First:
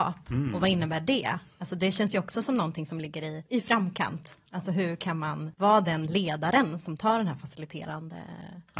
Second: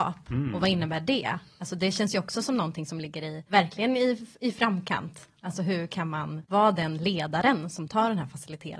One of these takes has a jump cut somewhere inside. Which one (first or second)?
first